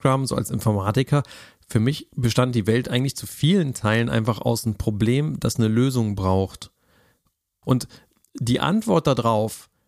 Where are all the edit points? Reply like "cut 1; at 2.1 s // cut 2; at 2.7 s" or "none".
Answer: cut 1; at 7.6 s